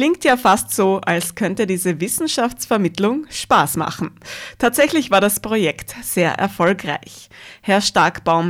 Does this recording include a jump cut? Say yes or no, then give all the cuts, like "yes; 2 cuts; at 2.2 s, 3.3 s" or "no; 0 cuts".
no; 0 cuts